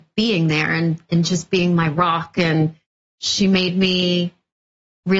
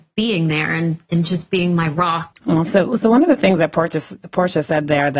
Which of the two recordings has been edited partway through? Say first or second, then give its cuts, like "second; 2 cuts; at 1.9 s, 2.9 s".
second; 1 cut; at 2.3 s